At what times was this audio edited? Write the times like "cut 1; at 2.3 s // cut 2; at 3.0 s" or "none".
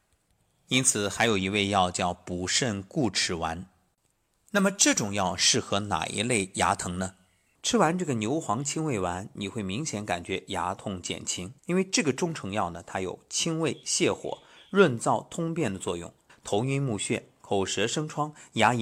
cut 1; at 7.5 s // cut 2; at 11.6 s // cut 3; at 16.3 s